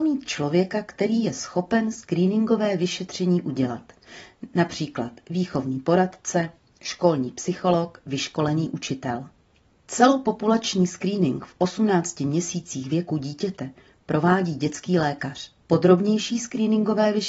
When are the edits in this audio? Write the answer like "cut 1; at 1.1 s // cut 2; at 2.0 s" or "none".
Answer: cut 1; at 9.8 s // cut 2; at 15.6 s